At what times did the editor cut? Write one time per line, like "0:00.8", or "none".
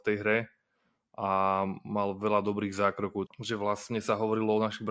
0:03.3